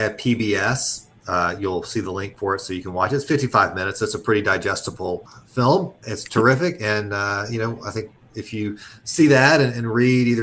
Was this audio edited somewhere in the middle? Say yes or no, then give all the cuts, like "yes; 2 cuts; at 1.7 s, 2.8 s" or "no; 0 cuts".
no; 0 cuts